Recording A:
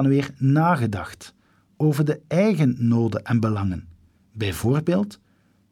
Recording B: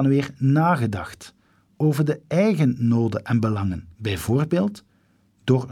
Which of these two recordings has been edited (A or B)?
B